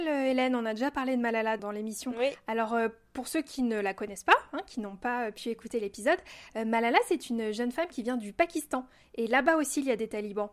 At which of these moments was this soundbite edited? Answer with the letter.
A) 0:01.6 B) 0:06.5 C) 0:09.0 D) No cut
A